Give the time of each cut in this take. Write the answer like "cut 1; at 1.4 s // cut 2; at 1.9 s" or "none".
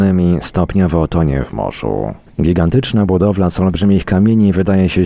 cut 1; at 2.2 s

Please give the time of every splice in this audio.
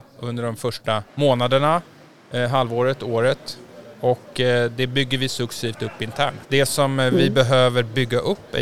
cut 1; at 1.1 s // cut 2; at 6.4 s

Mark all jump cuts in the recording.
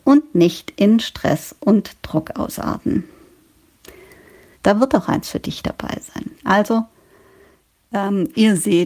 cut 1; at 4.5 s // cut 2; at 6.4 s

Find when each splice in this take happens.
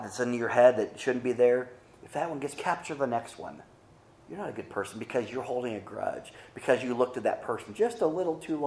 cut 1; at 2.6 s // cut 2; at 4.1 s

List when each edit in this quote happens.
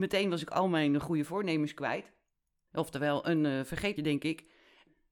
cut 1; at 4.0 s

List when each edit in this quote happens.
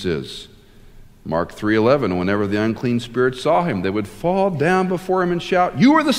none

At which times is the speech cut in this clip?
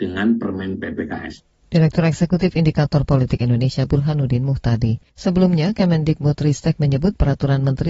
cut 1; at 5.1 s

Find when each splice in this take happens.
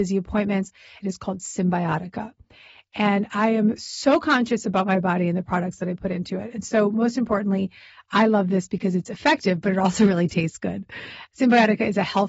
cut 1; at 1.0 s

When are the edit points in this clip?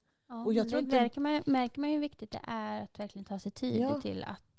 none

